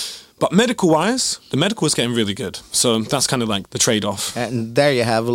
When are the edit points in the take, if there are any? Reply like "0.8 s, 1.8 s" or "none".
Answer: 3.7 s